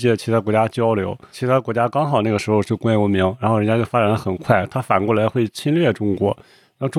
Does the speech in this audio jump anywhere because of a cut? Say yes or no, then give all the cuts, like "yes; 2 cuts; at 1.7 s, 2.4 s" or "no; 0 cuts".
no; 0 cuts